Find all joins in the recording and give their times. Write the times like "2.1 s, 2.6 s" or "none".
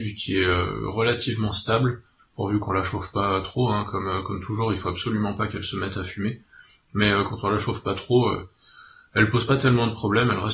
none